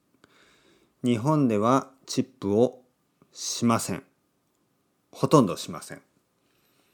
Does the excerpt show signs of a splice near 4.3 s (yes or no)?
no